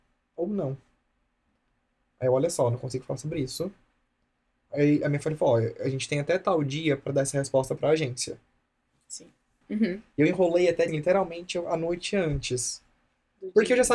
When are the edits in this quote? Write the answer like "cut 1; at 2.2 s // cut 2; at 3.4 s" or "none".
cut 1; at 9.6 s // cut 2; at 10.9 s